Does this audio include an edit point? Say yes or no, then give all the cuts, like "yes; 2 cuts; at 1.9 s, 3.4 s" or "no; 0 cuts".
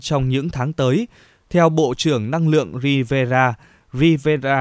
no; 0 cuts